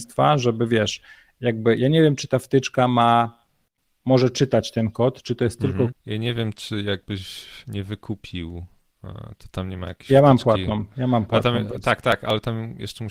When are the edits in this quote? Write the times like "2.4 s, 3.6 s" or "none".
5.9 s